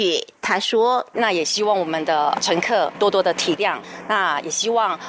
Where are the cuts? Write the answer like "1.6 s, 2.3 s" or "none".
1.1 s